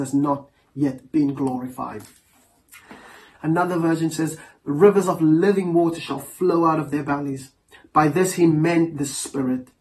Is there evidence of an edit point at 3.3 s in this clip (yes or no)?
yes